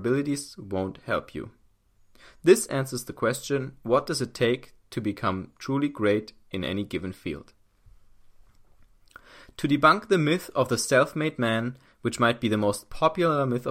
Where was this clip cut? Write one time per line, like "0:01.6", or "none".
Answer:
none